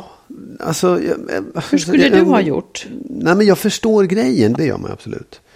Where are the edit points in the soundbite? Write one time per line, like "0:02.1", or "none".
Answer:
0:04.5